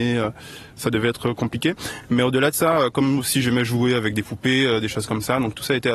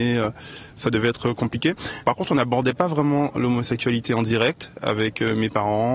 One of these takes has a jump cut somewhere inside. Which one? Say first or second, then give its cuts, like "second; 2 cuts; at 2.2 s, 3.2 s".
second; 1 cut; at 2.0 s